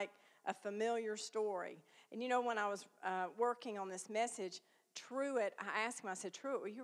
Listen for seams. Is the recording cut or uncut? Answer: uncut